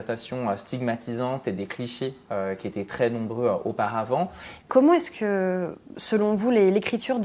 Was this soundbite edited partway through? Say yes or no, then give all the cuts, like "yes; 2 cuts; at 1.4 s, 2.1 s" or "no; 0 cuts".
yes; 1 cut; at 4.6 s